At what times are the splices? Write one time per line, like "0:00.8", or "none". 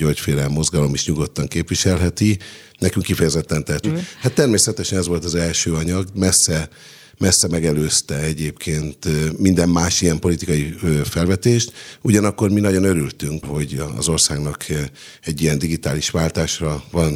0:03.8
0:13.4